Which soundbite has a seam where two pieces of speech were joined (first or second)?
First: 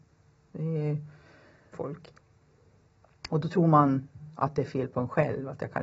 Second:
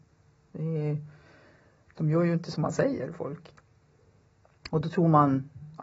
first